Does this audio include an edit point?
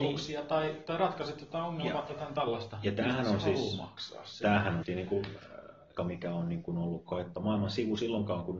yes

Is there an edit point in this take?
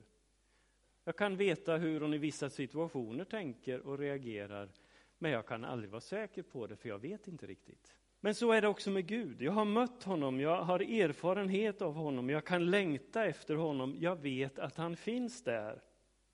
yes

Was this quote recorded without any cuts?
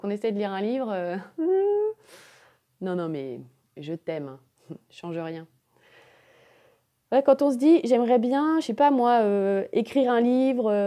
yes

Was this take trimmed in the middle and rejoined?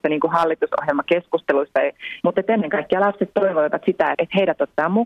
yes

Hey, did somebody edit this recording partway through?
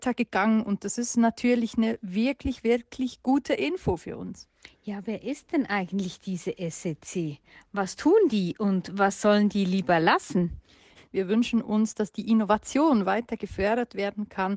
yes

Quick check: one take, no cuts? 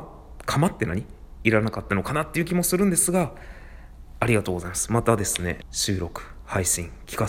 no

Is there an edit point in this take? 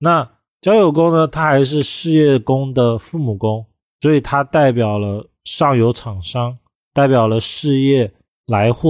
no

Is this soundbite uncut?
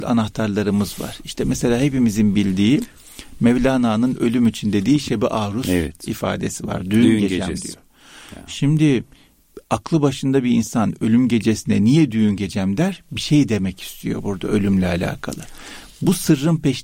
yes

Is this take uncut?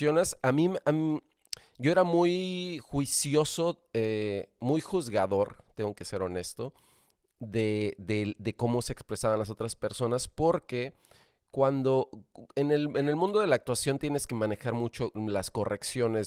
yes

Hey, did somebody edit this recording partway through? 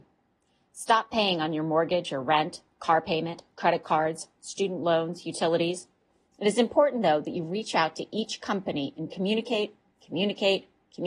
no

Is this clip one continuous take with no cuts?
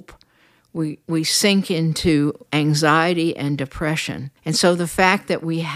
no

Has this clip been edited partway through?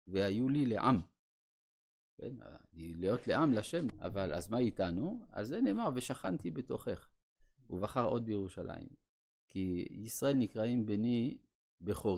yes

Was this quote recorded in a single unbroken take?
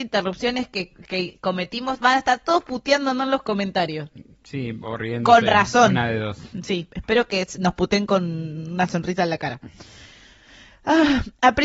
yes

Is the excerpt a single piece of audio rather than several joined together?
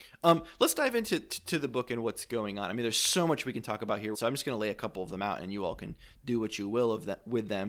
no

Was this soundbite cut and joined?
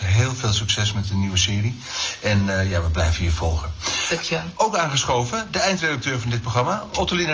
no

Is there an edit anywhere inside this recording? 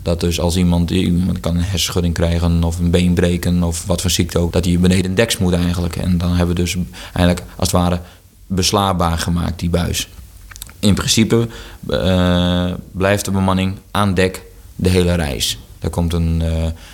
yes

